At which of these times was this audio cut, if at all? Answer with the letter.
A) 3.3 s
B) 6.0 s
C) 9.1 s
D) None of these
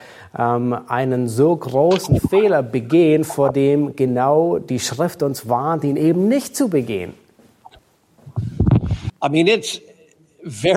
C